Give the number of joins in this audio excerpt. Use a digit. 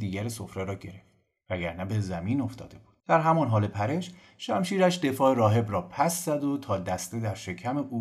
1